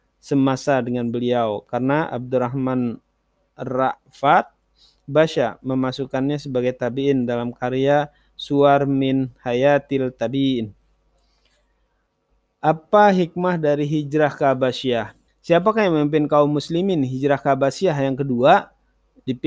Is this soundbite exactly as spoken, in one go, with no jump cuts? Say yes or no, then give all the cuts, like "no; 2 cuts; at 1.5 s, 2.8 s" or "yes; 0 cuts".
no; 1 cut; at 15.3 s